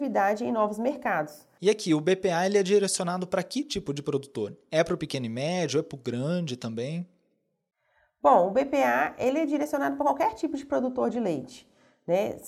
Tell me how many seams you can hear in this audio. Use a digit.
1